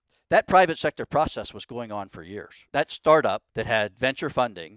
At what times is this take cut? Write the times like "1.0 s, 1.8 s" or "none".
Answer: 3.5 s